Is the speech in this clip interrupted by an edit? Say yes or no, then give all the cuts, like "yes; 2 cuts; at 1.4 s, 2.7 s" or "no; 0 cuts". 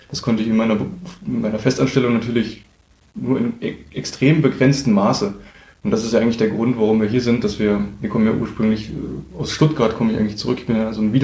no; 0 cuts